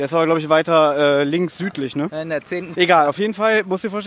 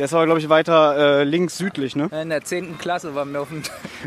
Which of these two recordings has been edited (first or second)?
first